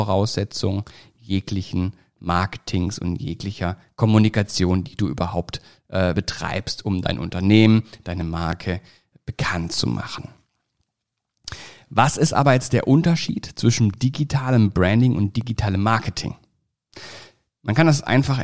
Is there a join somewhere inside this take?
no; 0 cuts

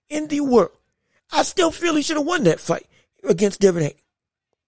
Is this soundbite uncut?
yes; 0 cuts

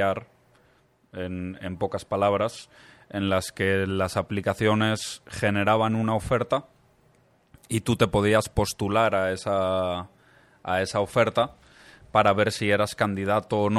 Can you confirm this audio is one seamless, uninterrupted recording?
yes; 0 cuts

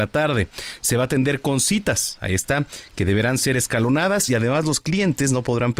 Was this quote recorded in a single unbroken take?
yes; 0 cuts

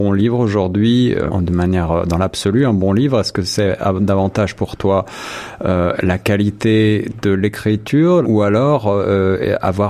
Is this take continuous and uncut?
no; 2 cuts; at 1.3 s, 8.2 s

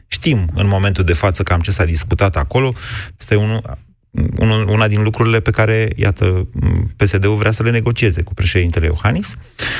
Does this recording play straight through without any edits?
no; 1 cut; at 3.2 s

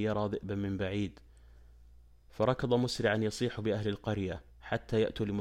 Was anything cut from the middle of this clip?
yes; 1 cut; at 4.5 s

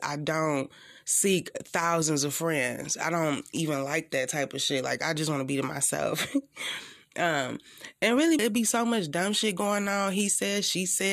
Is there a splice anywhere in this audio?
yes; 1 cut; at 8.4 s

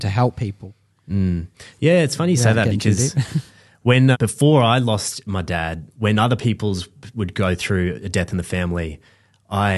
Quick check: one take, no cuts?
no; 1 cut; at 4.1 s

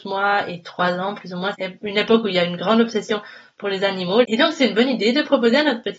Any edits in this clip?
yes; 2 cuts; at 1.5 s, 4.2 s

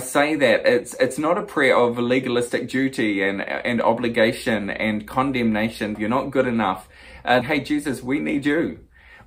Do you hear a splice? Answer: yes; 2 cuts; at 6.0 s, 7.4 s

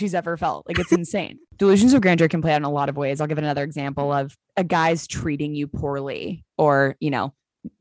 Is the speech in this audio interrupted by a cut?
no; 0 cuts

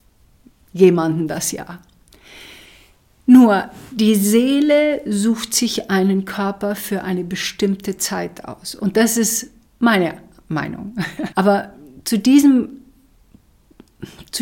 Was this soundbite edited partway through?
yes; 1 cut; at 11.3 s

